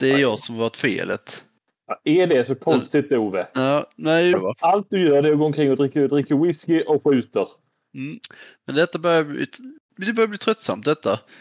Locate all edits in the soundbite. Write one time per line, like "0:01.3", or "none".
0:04.3